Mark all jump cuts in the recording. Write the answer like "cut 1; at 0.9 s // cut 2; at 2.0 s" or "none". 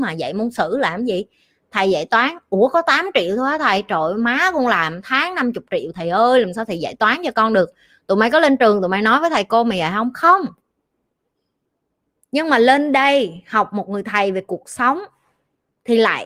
none

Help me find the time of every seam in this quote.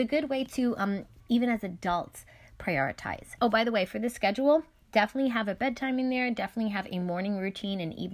cut 1; at 1.2 s // cut 2; at 3.4 s

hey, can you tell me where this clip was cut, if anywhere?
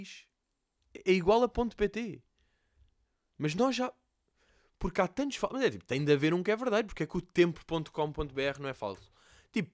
none

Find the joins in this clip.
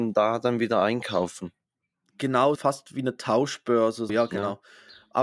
cut 1; at 2.5 s // cut 2; at 4.1 s

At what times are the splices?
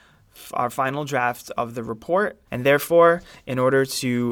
cut 1; at 2.5 s

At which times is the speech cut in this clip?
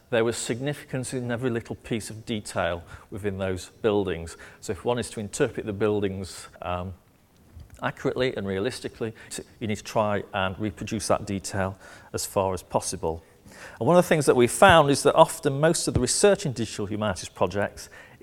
cut 1; at 6.6 s // cut 2; at 9.3 s

